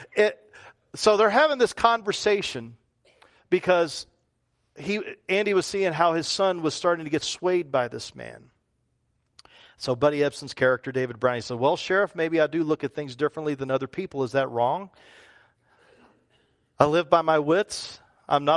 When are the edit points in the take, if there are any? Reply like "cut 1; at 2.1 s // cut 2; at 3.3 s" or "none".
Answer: none